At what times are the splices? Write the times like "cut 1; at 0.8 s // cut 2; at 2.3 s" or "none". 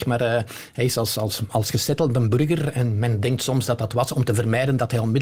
none